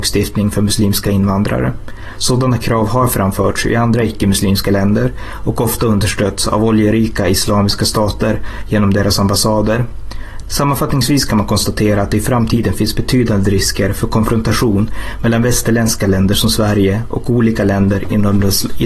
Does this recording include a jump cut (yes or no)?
yes